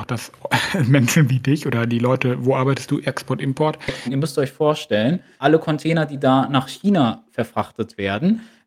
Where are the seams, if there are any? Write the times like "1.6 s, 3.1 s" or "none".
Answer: 4.0 s, 5.4 s